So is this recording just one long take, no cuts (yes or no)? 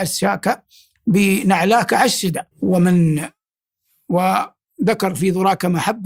no